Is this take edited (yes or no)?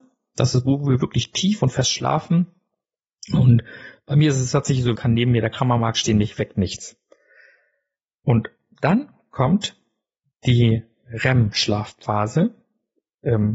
yes